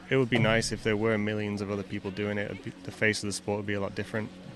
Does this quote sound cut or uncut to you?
uncut